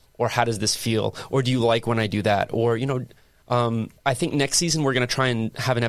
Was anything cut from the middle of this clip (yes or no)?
yes